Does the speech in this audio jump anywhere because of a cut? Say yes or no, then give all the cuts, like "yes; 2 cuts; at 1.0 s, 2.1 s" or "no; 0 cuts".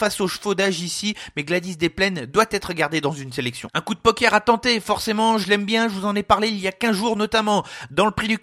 no; 0 cuts